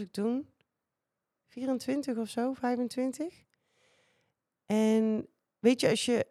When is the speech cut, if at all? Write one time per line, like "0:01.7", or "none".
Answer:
none